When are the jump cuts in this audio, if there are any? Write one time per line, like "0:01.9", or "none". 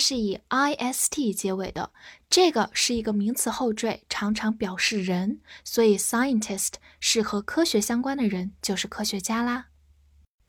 none